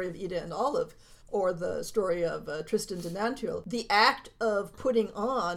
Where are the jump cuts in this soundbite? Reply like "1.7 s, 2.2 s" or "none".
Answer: 1.2 s